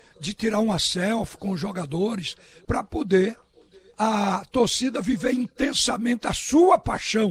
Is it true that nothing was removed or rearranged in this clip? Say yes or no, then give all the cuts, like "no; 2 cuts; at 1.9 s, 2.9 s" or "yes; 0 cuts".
no; 1 cut; at 2.6 s